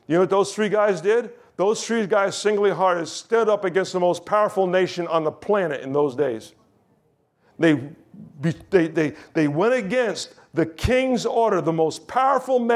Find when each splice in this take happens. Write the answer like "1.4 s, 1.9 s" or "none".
none